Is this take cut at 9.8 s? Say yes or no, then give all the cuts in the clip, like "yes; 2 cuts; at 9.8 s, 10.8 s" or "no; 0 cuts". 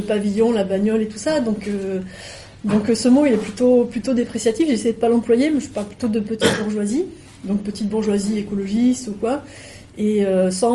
no; 0 cuts